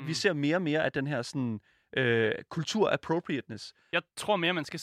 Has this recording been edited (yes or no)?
no